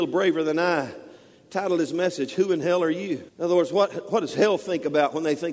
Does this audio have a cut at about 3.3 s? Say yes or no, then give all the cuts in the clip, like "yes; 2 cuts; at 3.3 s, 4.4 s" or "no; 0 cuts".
yes; 1 cut; at 3.3 s